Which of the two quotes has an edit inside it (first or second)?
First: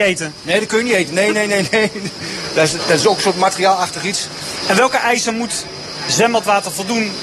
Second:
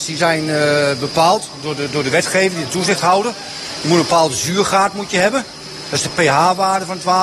first